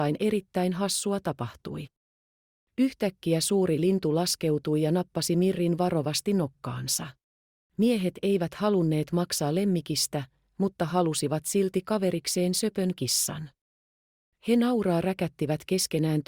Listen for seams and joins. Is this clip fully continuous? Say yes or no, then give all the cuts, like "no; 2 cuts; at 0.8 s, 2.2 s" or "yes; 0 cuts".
no; 1 cut; at 7.6 s